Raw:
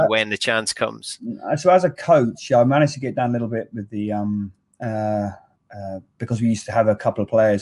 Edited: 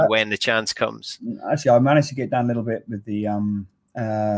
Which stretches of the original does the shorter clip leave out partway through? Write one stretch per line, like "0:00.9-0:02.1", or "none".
0:01.6-0:02.5